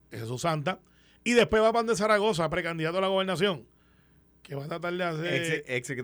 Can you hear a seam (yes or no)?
no